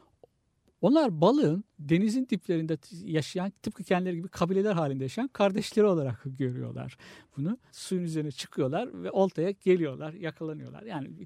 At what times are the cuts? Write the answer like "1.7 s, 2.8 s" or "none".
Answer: 7.7 s